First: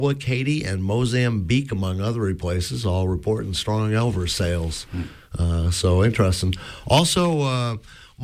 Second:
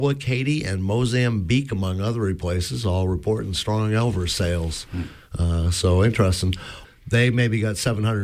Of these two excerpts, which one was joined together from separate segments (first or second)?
second